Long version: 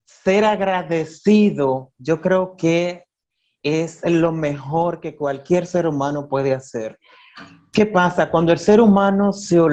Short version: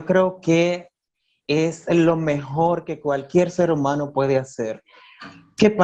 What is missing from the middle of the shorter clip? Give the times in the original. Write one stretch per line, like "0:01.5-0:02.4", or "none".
none

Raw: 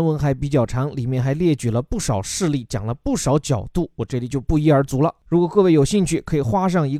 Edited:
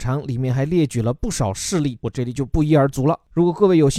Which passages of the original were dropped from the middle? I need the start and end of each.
0:02.7-0:03.9

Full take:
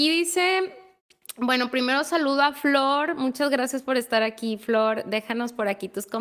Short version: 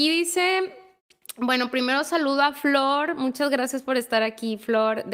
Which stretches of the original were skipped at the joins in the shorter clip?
none

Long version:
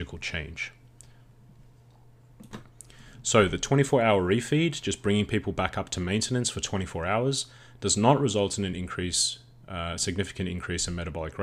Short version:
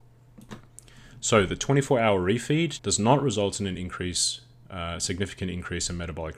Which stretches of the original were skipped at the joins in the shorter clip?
0:04.8-0:07.8

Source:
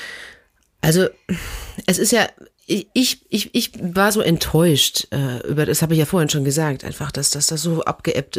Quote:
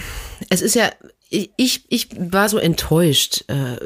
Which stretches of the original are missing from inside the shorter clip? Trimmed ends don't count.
0:03.3-0:03.5

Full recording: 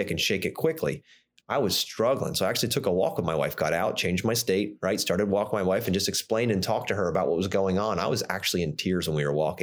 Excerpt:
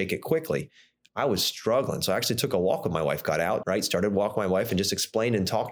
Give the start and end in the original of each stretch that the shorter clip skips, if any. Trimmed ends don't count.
0:04.0-0:04.8

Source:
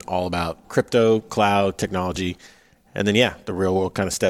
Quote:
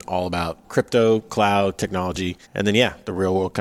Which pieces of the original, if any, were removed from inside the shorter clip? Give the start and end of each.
0:02.4-0:02.8

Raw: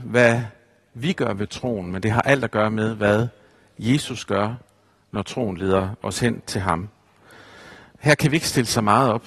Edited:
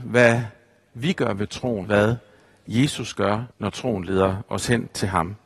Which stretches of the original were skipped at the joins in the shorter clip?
0:01.8-0:03.0
0:04.6-0:05.0

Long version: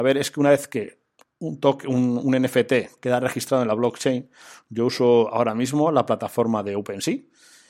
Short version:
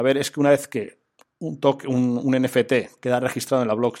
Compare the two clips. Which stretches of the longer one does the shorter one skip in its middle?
none

